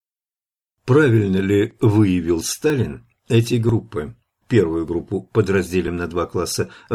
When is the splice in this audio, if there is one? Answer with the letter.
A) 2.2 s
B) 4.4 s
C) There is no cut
B